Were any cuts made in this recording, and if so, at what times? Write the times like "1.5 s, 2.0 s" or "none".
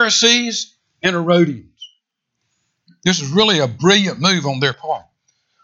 2.9 s